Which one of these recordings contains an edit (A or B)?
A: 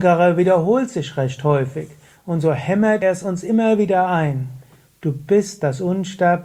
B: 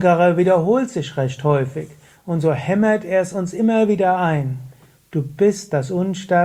A